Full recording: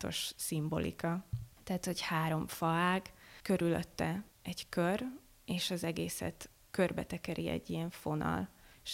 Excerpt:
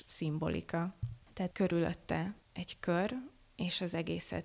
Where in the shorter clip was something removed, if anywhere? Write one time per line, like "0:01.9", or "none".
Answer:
0:01.5